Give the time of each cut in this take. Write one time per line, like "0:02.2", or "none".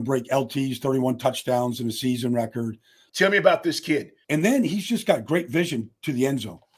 0:03.1
0:04.2